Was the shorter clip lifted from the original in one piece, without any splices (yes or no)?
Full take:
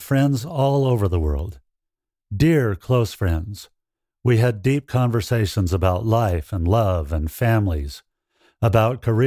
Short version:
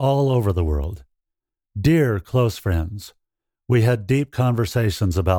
yes